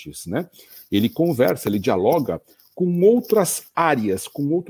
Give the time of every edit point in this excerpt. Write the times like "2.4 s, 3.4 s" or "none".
none

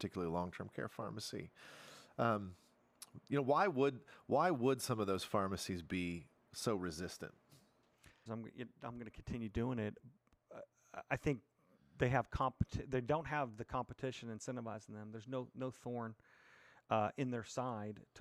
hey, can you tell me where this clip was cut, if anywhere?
8.3 s

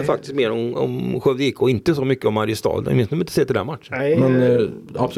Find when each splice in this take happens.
none

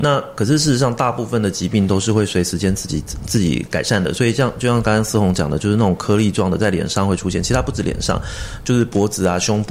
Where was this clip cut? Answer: none

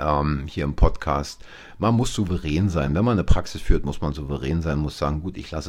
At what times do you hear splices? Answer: none

